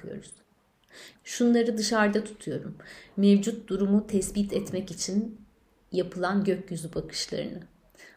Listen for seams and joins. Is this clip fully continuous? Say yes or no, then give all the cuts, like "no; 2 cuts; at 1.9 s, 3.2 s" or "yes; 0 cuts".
no; 1 cut; at 1.1 s